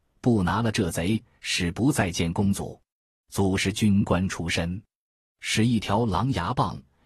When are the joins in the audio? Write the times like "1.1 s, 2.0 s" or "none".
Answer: 3.1 s